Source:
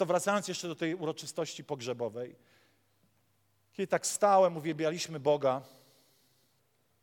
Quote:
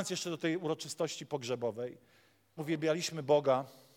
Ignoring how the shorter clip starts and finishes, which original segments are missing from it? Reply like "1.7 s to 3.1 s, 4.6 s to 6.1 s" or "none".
2.9 s to 4.5 s